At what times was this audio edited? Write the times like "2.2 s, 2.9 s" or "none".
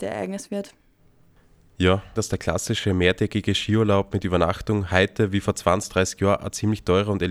2.1 s

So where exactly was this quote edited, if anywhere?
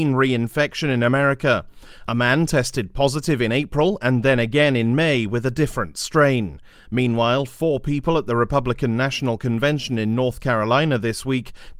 6.7 s

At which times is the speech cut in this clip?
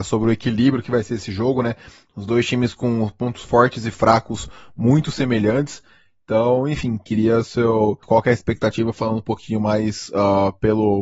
8.0 s

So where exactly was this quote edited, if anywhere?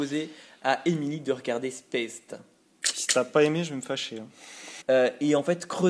4.8 s

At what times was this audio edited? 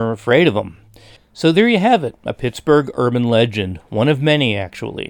1.2 s

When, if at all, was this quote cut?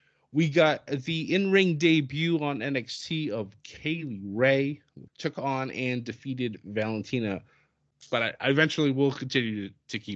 5.1 s, 7.9 s

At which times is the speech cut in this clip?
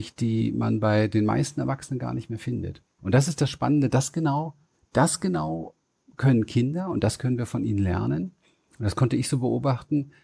3.0 s

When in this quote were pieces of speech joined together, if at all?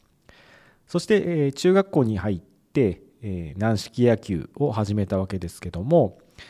none

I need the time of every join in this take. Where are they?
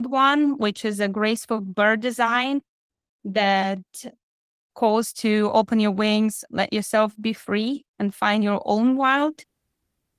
6.5 s

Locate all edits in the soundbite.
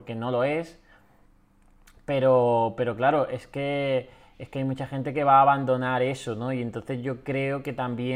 none

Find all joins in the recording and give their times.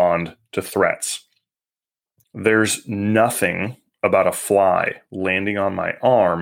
2.2 s

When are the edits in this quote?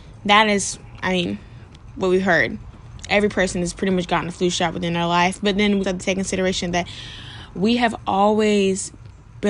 5.8 s

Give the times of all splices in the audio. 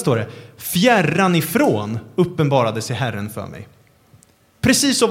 none

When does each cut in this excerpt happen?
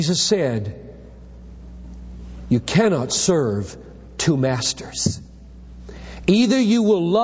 none

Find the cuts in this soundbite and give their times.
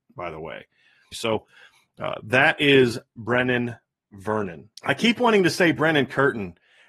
1.1 s, 4.8 s

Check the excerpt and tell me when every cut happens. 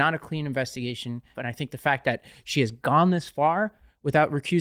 1.3 s

